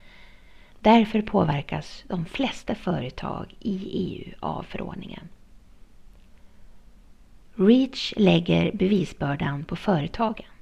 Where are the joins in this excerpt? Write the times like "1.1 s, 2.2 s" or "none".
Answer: none